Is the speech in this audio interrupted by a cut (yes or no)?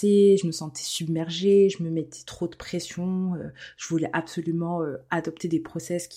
no